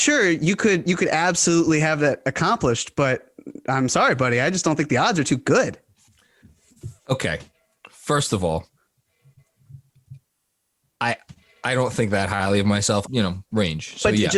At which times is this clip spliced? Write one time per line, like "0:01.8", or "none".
0:07.0
0:13.0